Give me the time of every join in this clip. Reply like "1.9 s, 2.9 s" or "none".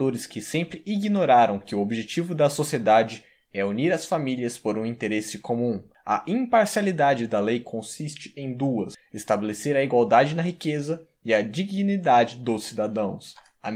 none